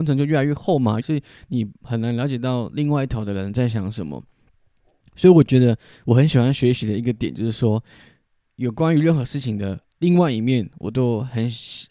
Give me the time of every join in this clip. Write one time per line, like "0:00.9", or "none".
0:01.0